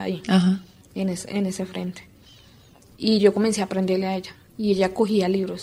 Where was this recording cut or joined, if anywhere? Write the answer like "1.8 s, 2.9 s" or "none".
none